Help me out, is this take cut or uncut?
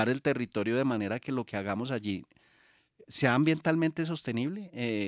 uncut